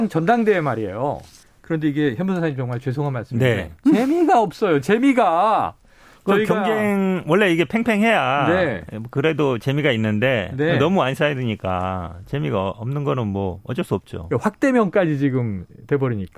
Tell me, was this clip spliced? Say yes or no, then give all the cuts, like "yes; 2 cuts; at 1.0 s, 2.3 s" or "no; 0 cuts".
yes; 1 cut; at 1.4 s